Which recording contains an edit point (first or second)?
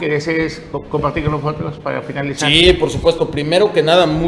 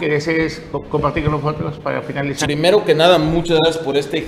second